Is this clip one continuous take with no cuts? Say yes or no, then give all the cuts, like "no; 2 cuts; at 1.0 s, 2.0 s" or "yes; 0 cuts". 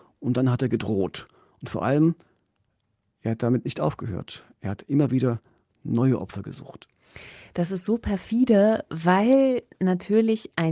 yes; 0 cuts